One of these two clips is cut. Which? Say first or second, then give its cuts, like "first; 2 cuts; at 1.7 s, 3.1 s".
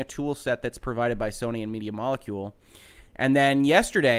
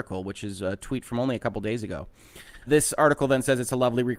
second; 1 cut; at 2.7 s